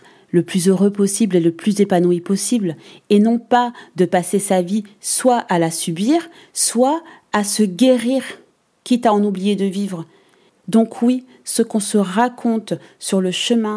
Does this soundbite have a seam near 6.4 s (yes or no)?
no